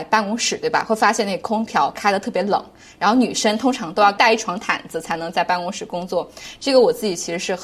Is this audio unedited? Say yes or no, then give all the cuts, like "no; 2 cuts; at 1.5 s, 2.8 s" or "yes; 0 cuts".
yes; 0 cuts